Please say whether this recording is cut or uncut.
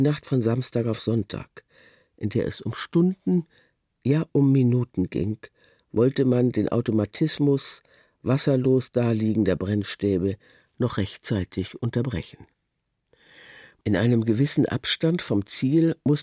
uncut